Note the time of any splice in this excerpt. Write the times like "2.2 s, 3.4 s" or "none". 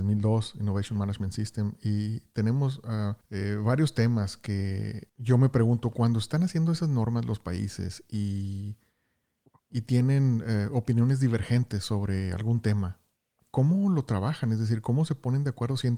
none

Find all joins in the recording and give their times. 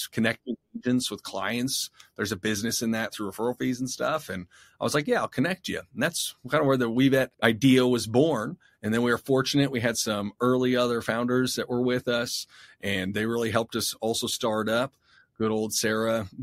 7.3 s

